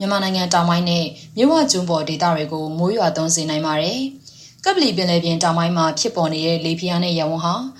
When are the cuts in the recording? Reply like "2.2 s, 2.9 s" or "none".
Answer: none